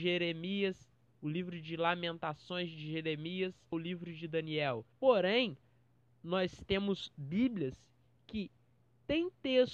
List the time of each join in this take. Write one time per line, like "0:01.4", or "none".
0:03.7
0:04.9